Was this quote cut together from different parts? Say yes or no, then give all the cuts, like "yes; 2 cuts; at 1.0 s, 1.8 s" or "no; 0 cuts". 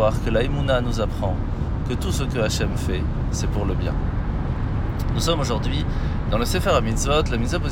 no; 0 cuts